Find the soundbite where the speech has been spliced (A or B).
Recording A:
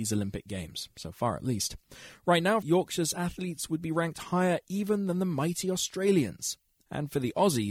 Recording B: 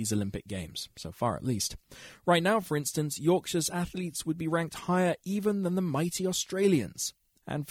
A